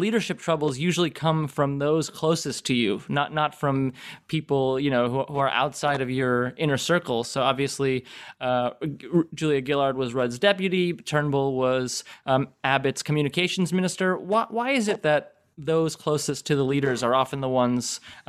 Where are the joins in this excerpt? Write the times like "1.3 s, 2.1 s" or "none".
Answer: none